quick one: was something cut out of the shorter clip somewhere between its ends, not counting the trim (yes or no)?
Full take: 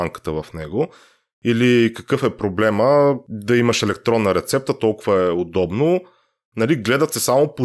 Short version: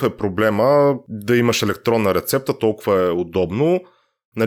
no